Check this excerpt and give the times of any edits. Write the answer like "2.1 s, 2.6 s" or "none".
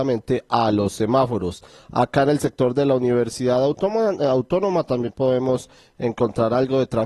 none